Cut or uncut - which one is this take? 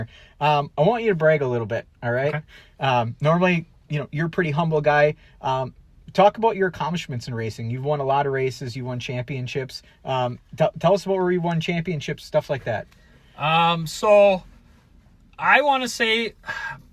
uncut